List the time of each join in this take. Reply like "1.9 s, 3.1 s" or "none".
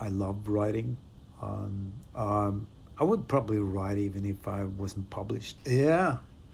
2.1 s, 5.6 s